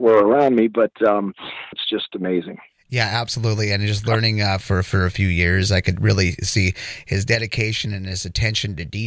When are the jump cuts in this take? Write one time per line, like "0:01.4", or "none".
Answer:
0:01.7
0:04.6